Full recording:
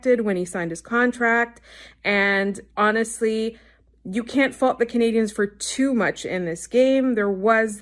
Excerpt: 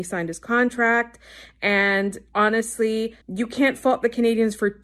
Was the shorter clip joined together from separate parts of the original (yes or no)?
yes